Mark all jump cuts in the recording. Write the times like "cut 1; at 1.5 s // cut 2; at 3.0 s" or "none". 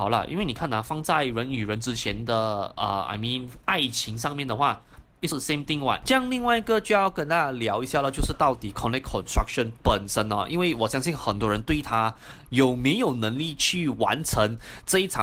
cut 1; at 5.3 s